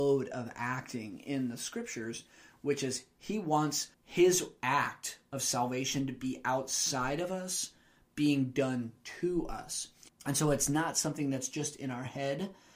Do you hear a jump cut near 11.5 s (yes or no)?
no